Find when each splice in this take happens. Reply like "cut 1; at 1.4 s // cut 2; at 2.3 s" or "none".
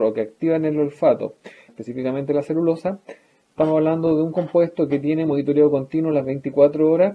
cut 1; at 1.7 s

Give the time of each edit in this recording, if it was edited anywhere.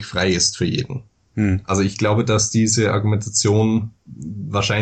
none

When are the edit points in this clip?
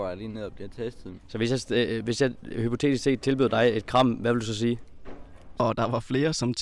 cut 1; at 1.1 s // cut 2; at 5.6 s

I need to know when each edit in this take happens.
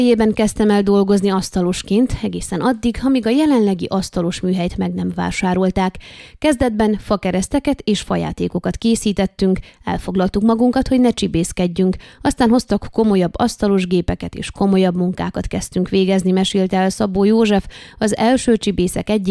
none

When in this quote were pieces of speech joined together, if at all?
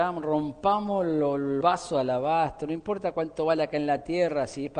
cut 1; at 1.6 s

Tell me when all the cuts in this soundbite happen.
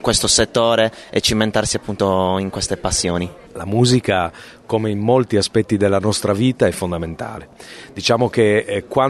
cut 1; at 3.5 s

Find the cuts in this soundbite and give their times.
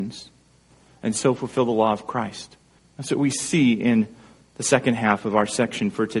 cut 1; at 2.8 s

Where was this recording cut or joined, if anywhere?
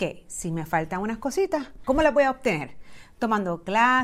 cut 1; at 1.8 s

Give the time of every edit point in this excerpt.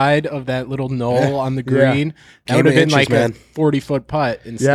none

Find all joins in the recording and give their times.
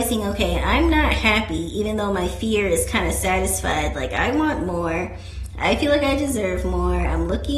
none

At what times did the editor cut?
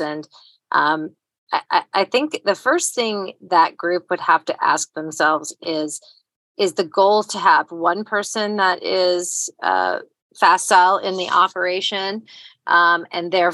cut 1; at 3.5 s

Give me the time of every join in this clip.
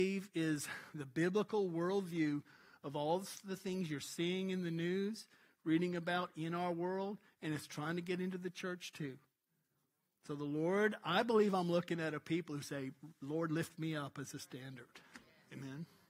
none

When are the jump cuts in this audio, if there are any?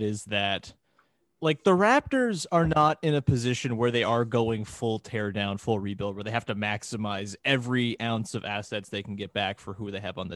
none

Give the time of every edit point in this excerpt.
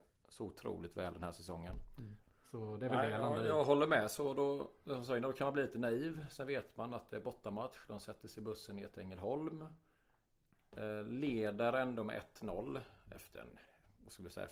cut 1; at 2.2 s

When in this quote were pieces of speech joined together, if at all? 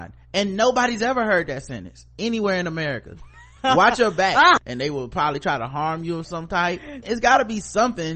cut 1; at 3.6 s // cut 2; at 4.6 s // cut 3; at 7.0 s

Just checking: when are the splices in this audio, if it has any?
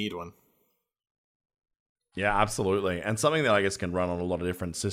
none

